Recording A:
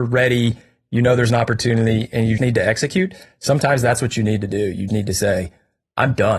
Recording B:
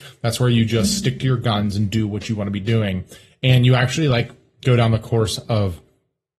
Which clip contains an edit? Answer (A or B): A